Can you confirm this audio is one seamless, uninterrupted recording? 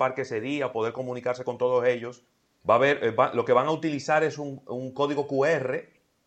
no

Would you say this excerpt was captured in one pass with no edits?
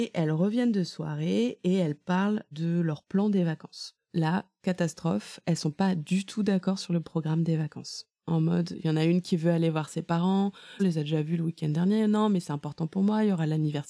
no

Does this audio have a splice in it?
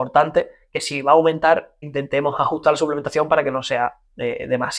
yes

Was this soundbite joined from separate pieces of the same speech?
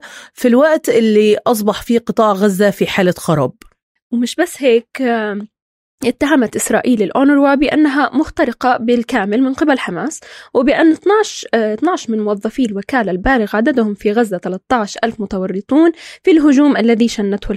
no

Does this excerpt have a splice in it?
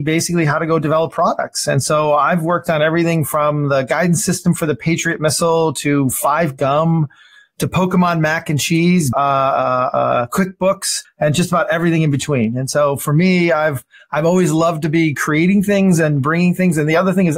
yes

